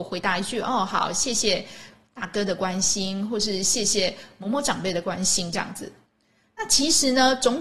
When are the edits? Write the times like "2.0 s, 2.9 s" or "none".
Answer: 6.1 s